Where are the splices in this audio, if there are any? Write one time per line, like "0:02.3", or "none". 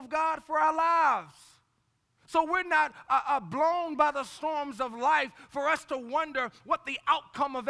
none